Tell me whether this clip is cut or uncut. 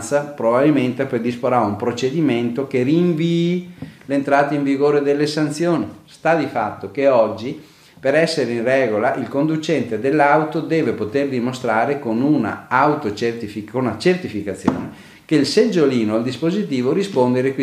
uncut